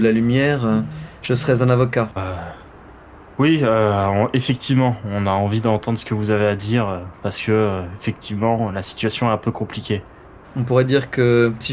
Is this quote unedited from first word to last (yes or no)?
no